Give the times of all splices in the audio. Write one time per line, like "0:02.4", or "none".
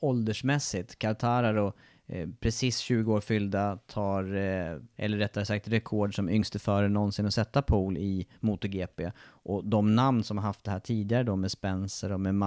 0:04.9